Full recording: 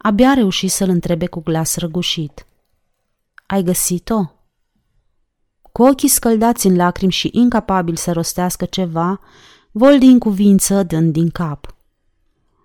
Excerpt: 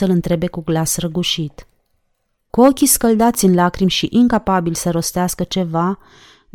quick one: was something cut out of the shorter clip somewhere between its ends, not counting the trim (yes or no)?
yes